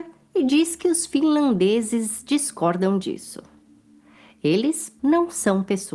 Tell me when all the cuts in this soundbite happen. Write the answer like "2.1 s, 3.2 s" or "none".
5.0 s